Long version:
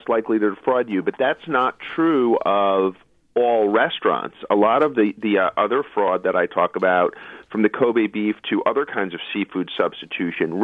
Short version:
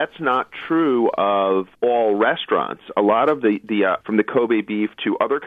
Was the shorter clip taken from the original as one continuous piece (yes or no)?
no